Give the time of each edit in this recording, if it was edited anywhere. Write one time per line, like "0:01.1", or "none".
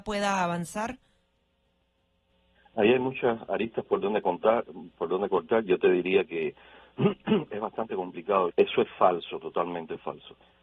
0:08.5